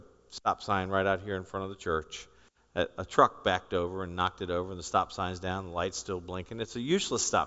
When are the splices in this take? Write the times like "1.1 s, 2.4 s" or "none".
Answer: none

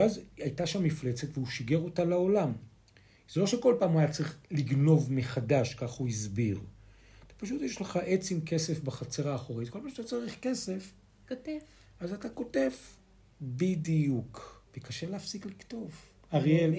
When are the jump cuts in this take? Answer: 14.7 s

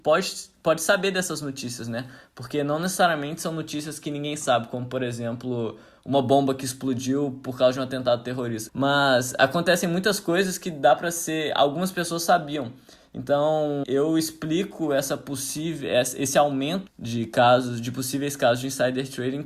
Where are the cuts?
8.7 s, 13.8 s, 16.9 s

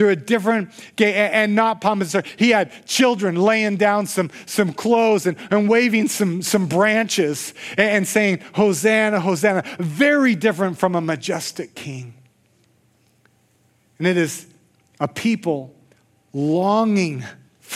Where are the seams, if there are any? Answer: none

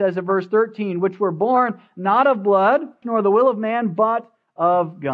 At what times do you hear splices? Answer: 3.0 s

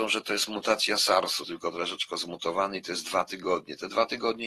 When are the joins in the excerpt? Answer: 1.4 s

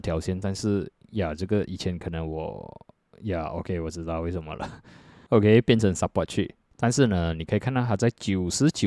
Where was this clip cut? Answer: 5.3 s, 6.7 s

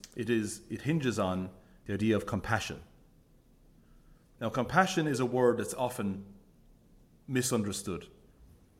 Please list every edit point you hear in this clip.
none

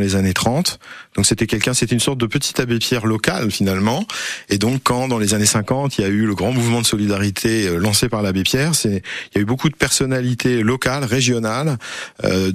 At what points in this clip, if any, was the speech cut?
none

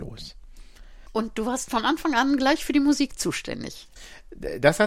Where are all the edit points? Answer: none

